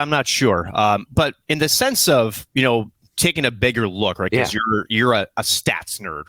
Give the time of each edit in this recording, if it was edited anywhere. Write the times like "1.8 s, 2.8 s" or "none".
1.1 s